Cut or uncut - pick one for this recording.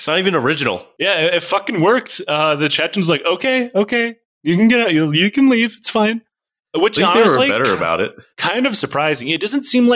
uncut